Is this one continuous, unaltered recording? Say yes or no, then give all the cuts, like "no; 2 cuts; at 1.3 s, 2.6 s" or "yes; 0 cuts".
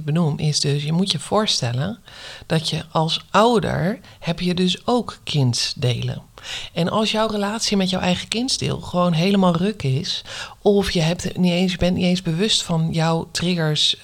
yes; 0 cuts